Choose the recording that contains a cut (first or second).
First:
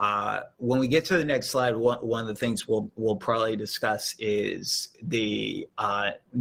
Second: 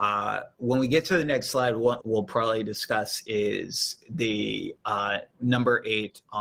second